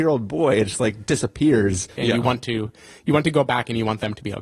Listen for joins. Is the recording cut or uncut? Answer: cut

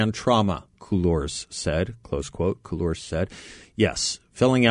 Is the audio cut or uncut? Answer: uncut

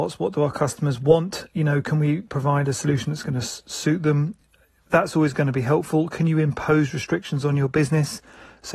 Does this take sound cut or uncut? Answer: uncut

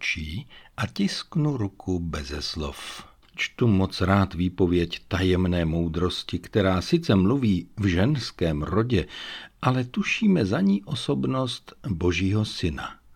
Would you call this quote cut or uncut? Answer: cut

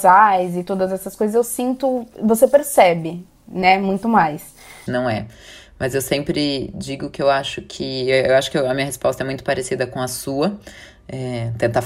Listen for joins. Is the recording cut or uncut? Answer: cut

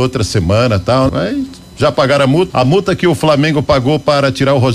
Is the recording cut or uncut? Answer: cut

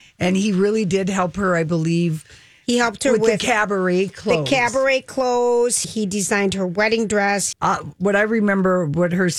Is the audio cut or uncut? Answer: cut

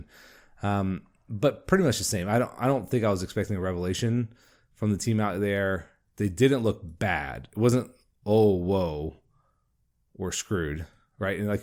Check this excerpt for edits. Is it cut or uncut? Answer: uncut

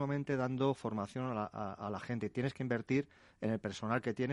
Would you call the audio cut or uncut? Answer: uncut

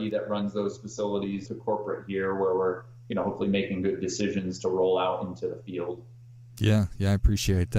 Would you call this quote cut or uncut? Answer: cut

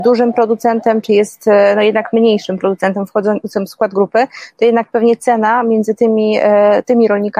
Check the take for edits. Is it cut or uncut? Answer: uncut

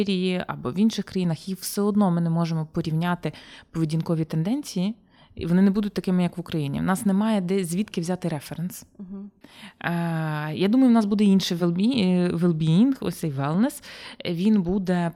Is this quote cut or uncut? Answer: uncut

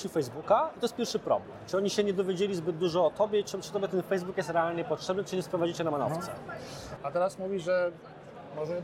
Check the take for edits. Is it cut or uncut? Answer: cut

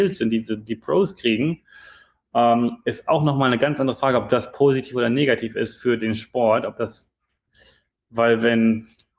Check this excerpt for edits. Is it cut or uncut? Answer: uncut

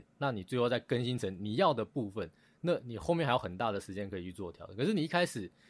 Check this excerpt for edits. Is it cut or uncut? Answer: uncut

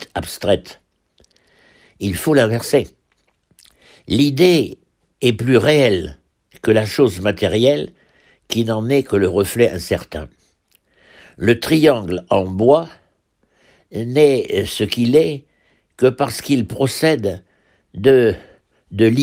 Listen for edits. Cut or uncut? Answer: uncut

